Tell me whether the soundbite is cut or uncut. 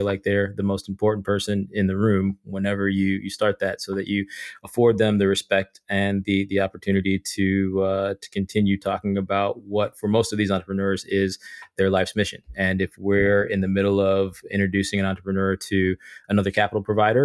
uncut